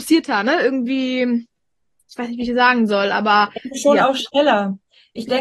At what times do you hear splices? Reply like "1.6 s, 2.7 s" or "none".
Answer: none

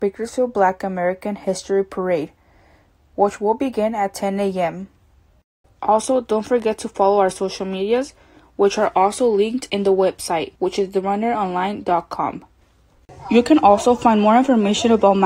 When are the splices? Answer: 5.6 s

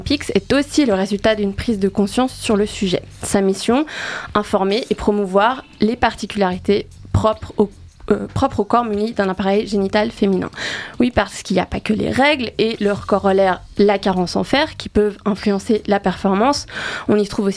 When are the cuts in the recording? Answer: none

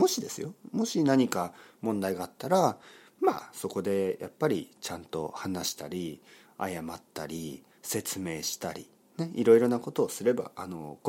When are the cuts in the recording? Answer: none

